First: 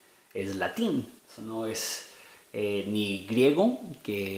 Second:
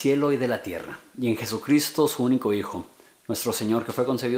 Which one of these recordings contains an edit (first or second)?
first